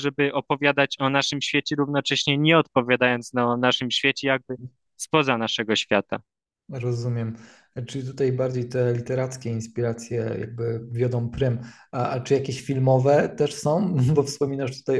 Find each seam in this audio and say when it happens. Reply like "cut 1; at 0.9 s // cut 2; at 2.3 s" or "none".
none

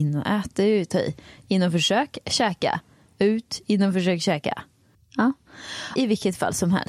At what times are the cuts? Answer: cut 1; at 4.9 s // cut 2; at 6.0 s

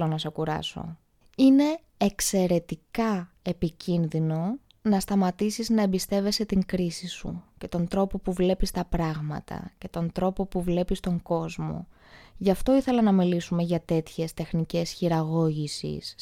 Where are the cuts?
cut 1; at 12.2 s

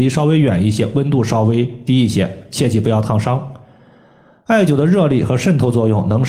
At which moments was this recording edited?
none

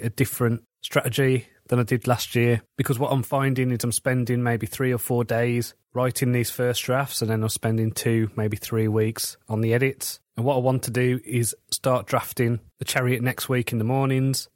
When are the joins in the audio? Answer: none

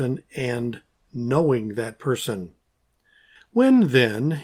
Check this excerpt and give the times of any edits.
cut 1; at 3.4 s

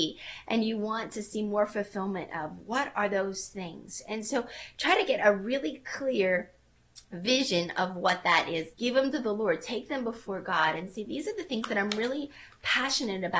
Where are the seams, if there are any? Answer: cut 1; at 8.7 s

